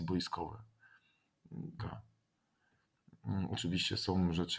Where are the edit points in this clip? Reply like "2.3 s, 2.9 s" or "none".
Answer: 1.8 s